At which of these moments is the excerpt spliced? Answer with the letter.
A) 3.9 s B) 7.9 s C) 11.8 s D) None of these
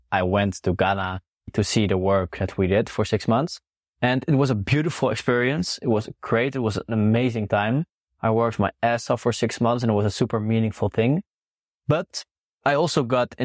D